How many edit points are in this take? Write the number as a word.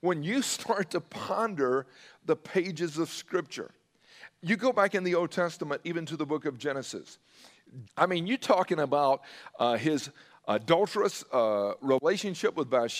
one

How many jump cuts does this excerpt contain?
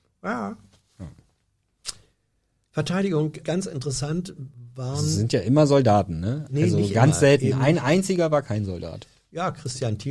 one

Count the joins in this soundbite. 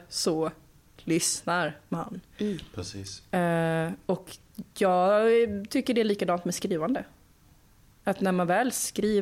zero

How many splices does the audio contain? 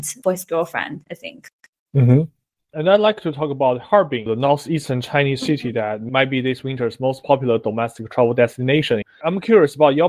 one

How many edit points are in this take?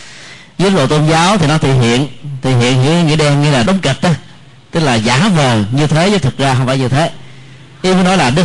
one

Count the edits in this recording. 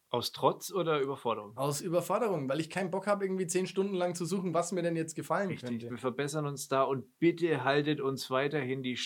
one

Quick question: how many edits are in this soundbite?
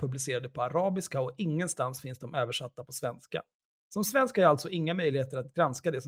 zero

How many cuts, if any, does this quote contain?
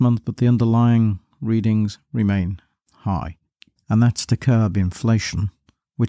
one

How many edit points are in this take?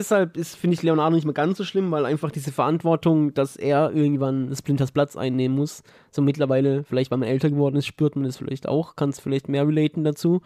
zero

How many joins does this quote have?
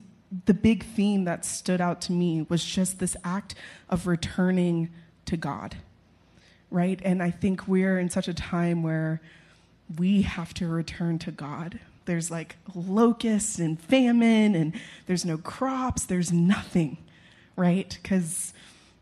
one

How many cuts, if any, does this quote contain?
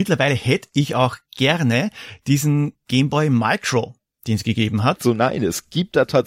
one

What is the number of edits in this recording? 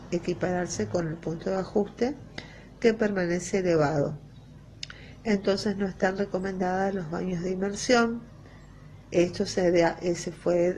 zero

